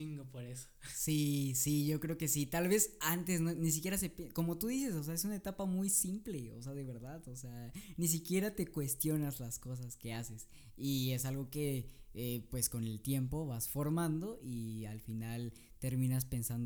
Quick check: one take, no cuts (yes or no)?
yes